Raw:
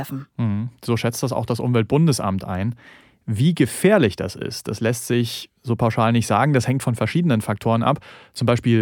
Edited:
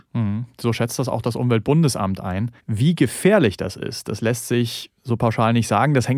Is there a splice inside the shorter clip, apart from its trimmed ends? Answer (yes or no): yes